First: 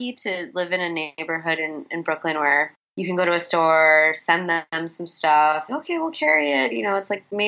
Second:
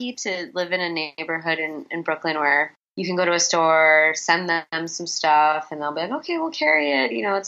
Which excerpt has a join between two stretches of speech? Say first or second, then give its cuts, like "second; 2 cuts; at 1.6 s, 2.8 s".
first; 1 cut; at 5.7 s